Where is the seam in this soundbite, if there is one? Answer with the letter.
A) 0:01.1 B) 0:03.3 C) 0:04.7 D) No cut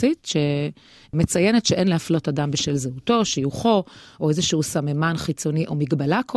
D